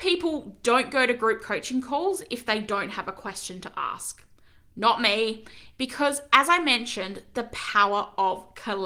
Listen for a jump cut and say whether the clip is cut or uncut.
cut